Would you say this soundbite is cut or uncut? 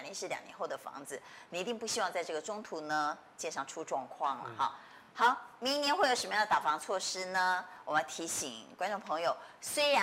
uncut